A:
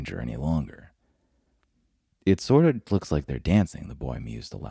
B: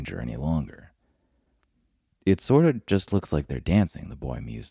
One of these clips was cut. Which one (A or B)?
A